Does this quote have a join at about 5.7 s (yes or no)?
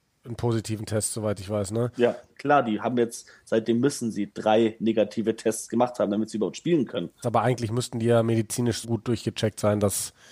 no